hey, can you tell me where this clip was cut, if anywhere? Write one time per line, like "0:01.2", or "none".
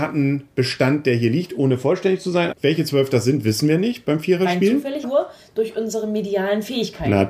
0:02.5
0:05.0